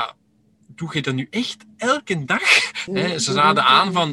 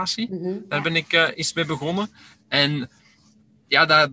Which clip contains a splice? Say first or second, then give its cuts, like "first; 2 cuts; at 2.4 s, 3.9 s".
first; 1 cut; at 2.9 s